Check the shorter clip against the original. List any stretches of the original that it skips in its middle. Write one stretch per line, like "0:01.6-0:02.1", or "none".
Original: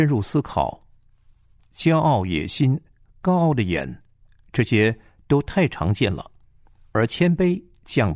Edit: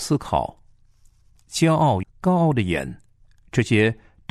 0:02.3-0:03.0